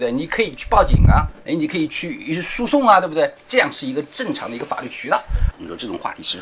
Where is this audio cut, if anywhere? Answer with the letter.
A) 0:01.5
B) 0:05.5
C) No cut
B